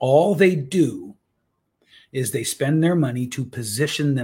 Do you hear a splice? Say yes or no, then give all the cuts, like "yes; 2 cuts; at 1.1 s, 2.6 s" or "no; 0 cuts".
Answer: no; 0 cuts